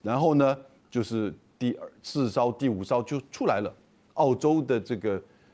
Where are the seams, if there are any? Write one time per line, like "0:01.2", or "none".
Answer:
0:04.1